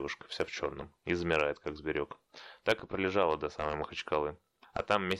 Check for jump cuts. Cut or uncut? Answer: uncut